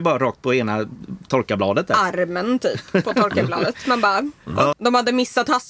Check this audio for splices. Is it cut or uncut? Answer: cut